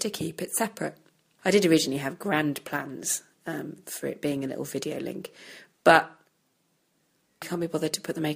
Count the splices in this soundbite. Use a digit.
2